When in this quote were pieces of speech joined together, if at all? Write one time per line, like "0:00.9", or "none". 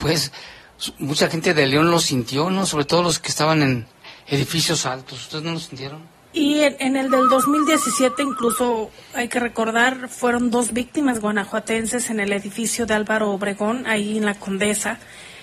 0:06.2